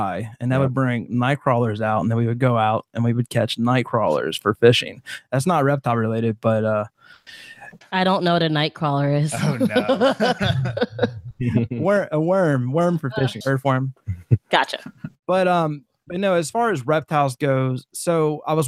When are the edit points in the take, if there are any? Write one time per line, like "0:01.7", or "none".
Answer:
0:13.4